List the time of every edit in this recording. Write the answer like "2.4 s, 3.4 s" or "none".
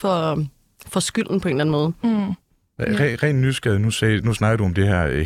none